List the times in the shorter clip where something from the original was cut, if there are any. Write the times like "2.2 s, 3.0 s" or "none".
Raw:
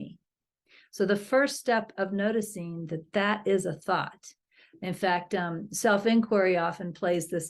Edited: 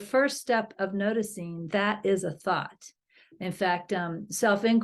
1.7 s